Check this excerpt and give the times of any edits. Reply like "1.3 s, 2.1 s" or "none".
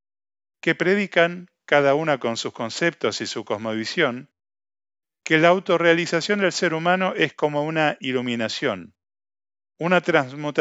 none

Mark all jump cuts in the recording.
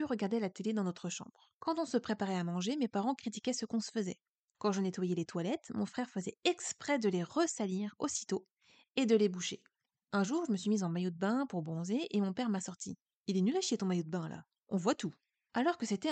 none

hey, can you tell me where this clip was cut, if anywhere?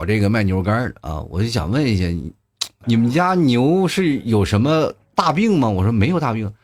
2.8 s

